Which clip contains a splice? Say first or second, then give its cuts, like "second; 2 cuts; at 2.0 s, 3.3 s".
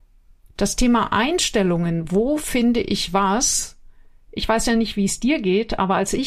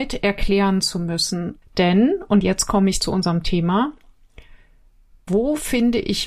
second; 2 cuts; at 1.6 s, 5.3 s